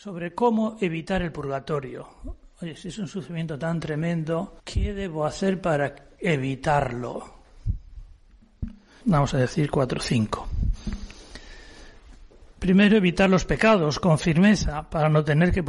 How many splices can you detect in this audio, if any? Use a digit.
2